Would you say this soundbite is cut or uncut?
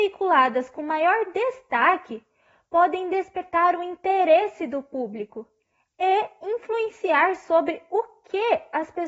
uncut